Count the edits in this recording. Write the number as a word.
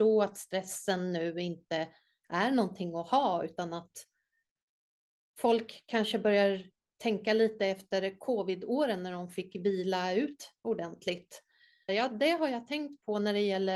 one